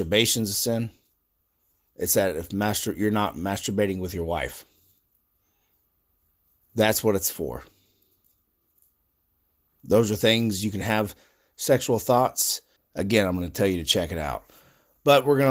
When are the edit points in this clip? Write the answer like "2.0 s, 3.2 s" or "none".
12.8 s